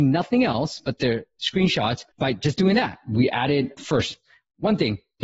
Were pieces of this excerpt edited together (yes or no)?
yes